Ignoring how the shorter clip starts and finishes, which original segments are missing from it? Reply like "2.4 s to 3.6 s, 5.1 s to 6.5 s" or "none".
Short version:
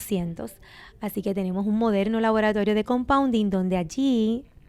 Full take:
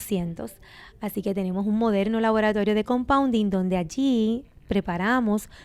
none